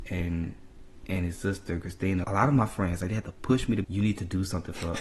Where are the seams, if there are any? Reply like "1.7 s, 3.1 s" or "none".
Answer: 2.2 s, 3.8 s